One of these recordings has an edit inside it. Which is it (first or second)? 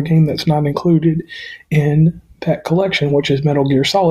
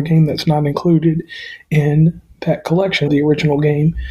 second